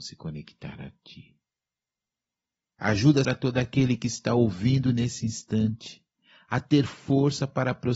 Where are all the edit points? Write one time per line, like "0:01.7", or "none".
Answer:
0:03.2